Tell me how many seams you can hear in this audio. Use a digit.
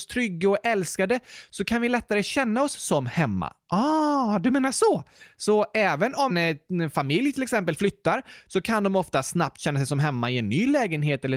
1